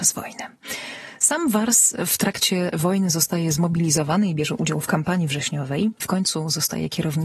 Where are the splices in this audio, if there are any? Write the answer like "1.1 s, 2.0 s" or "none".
6.0 s